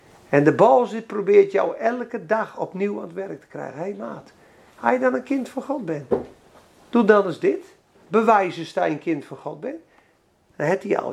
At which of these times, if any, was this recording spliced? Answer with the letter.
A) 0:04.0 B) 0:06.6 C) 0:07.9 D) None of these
D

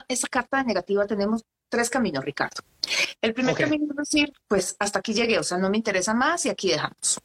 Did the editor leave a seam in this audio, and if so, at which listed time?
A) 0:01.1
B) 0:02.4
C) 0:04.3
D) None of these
C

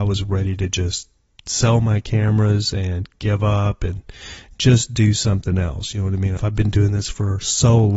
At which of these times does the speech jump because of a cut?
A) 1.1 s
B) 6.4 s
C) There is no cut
B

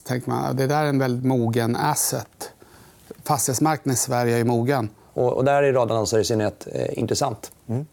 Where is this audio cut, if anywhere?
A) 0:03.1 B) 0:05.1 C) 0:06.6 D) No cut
B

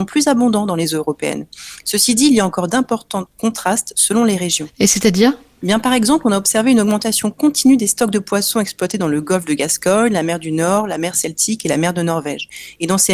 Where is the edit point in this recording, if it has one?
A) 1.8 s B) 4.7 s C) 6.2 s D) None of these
A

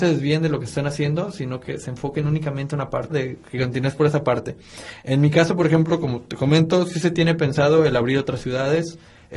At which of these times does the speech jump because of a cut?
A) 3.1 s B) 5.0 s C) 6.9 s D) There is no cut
A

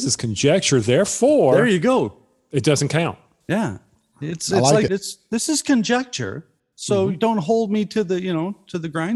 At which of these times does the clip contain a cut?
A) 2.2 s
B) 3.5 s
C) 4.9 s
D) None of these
C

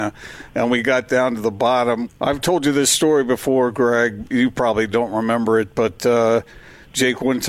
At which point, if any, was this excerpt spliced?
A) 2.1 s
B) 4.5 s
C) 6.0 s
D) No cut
A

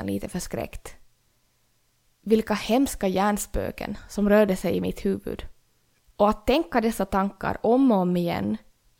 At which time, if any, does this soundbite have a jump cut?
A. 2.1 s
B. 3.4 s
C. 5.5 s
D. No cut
D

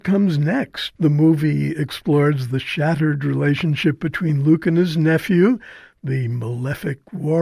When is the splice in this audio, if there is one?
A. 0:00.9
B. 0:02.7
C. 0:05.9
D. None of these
A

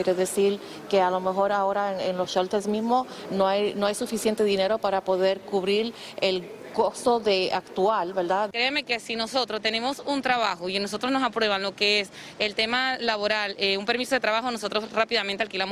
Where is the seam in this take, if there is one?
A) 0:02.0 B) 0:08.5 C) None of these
B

